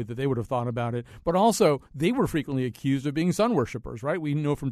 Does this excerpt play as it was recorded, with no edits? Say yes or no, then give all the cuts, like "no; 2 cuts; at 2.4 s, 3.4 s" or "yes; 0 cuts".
yes; 0 cuts